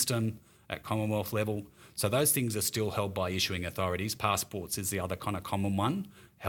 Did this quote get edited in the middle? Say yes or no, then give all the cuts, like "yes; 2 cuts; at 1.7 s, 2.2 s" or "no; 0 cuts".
no; 0 cuts